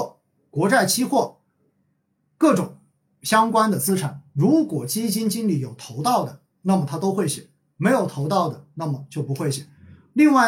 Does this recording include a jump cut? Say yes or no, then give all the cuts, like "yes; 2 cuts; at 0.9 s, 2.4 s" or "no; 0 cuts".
no; 0 cuts